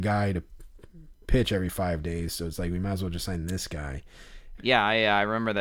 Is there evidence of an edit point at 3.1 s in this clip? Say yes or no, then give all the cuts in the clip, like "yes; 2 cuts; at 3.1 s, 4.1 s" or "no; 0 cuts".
no; 1 cut; at 4.6 s